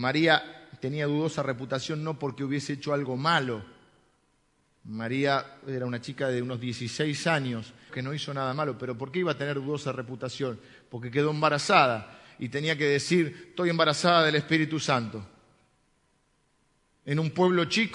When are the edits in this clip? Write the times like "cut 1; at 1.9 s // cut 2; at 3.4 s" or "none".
cut 1; at 7.9 s